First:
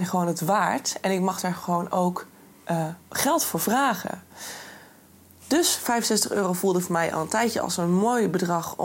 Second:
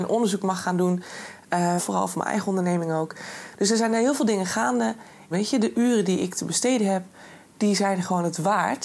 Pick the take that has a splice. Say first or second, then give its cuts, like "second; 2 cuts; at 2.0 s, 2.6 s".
second; 2 cuts; at 1.8 s, 5.3 s